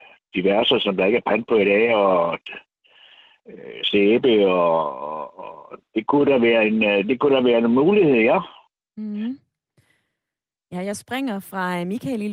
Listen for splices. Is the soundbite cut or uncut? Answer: uncut